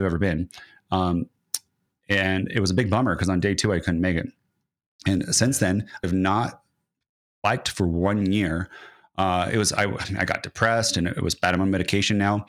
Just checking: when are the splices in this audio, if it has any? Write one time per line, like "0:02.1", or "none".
0:06.0